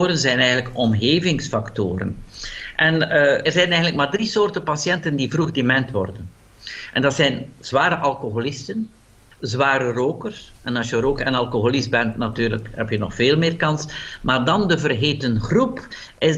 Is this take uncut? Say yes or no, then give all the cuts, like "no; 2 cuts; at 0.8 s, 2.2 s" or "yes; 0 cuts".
no; 1 cut; at 3.4 s